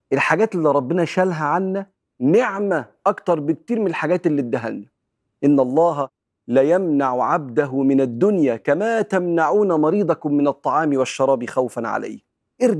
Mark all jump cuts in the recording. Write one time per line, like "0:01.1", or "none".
none